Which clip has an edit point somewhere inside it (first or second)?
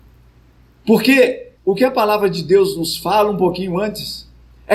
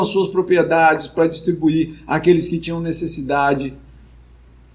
first